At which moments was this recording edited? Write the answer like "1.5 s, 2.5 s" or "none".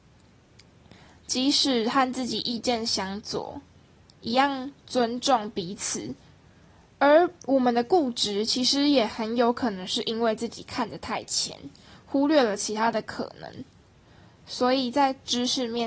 none